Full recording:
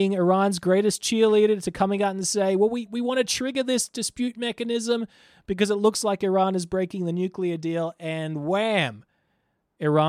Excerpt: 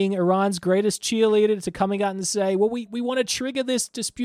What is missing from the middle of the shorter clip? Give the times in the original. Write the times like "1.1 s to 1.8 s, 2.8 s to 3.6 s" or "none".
none